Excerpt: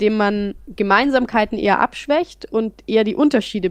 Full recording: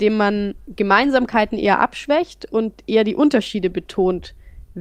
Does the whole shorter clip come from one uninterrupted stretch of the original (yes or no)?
yes